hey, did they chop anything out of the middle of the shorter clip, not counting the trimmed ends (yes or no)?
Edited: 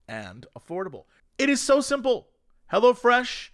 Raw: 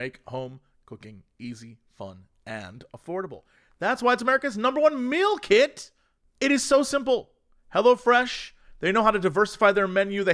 yes